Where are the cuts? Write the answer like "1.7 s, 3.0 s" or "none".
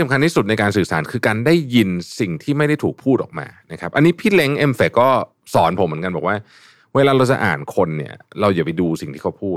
none